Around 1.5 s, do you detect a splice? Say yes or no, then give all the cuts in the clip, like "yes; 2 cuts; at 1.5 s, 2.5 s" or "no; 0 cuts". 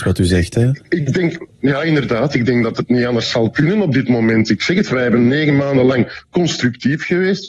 no; 0 cuts